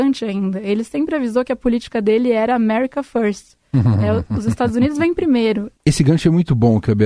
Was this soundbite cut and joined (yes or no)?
yes